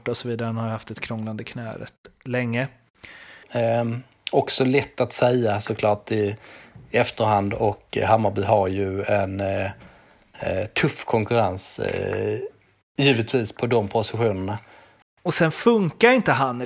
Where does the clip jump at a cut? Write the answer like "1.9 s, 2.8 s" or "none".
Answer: 3.4 s, 15.0 s